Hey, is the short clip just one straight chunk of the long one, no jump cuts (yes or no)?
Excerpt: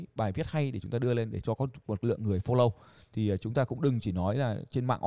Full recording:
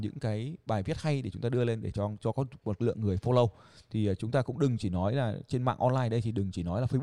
no